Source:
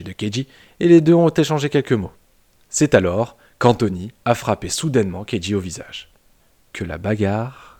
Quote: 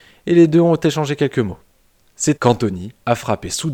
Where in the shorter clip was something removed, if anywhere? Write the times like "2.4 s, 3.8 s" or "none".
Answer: 2.4 s